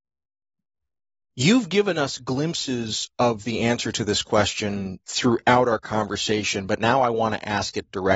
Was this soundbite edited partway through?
no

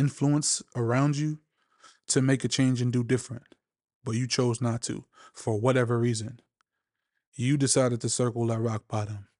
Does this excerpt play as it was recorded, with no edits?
yes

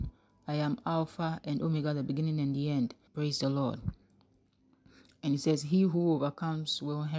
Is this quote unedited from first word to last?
no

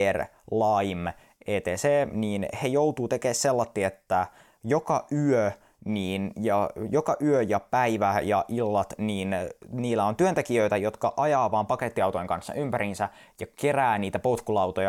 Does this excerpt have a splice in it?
no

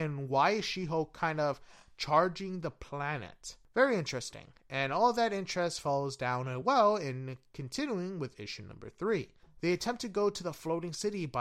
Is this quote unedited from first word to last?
yes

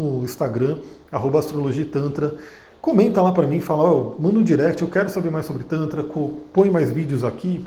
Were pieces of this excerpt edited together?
no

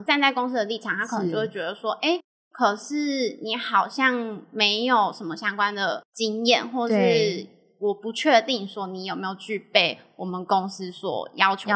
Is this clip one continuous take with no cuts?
yes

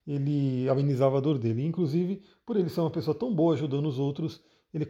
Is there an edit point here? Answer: no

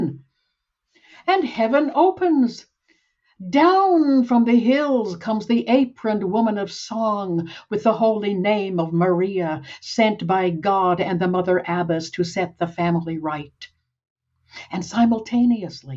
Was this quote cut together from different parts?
no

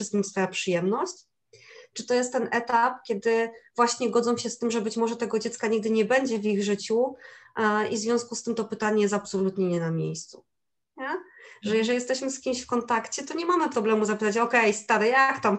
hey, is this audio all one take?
yes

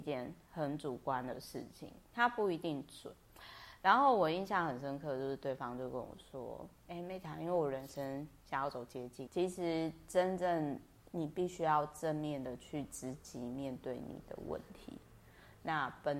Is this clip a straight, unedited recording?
no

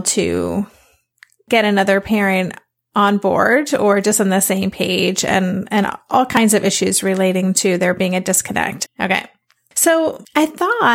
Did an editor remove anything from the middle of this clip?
yes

